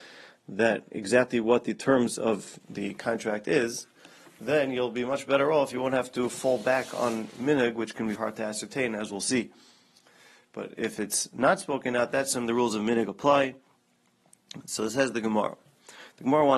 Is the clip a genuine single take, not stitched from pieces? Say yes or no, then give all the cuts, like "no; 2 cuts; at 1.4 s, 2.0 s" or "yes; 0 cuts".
no; 1 cut; at 8.2 s